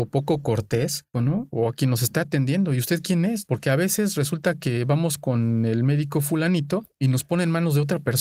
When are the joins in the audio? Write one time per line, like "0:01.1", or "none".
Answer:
0:01.1